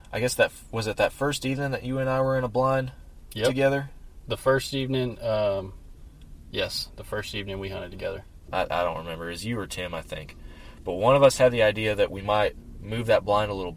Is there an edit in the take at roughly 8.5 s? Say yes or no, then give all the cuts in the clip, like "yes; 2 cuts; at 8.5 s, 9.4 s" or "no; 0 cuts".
yes; 1 cut; at 8.5 s